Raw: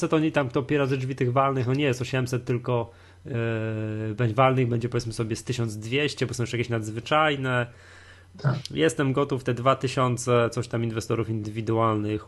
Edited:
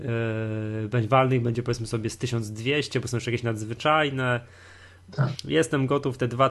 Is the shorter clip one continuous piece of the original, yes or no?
yes